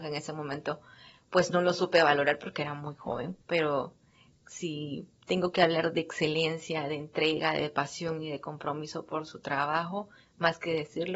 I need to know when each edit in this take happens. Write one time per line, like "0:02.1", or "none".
0:03.4

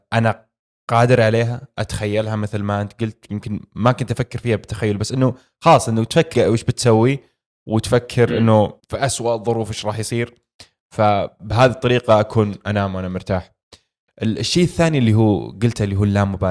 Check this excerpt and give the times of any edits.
0:06.3
0:08.8

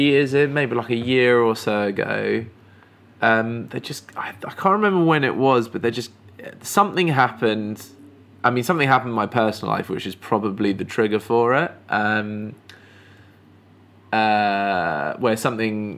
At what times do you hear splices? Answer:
none

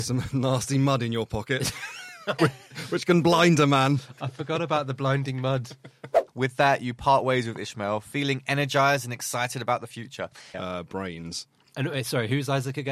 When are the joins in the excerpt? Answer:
0:02.4
0:10.5

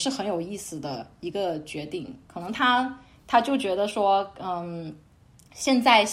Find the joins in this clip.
none

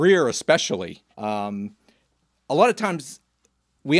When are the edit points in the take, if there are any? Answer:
0:01.1

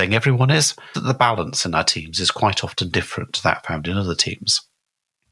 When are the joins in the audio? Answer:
0:00.9

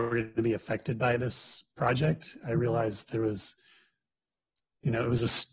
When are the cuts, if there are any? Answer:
none

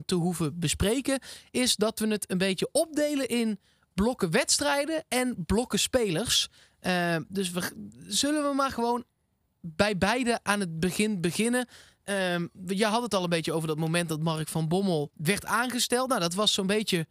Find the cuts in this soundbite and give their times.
0:15.1

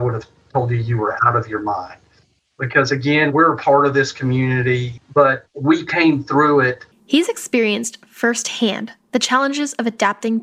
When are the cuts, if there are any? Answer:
0:05.0
0:06.9

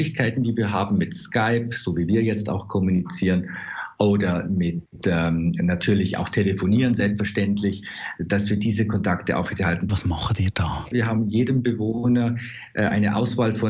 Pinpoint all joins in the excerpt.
0:09.9
0:10.9

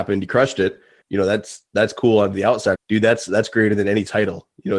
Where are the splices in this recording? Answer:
0:01.0
0:02.7

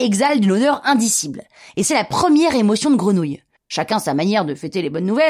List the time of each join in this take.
0:03.6

